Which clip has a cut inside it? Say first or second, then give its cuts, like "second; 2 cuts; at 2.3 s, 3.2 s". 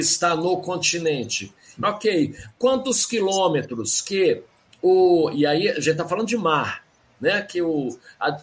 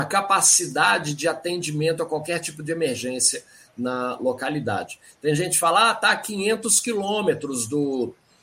first; 1 cut; at 1.8 s